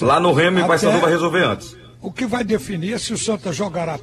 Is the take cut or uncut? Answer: uncut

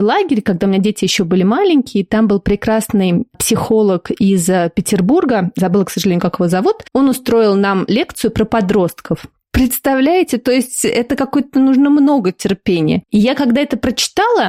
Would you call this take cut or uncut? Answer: cut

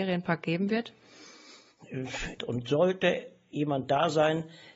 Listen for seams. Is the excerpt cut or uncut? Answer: cut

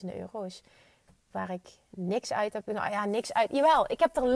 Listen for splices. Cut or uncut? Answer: cut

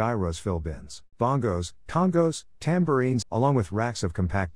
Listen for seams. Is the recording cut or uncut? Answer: cut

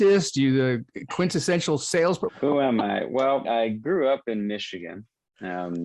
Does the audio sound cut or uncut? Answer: cut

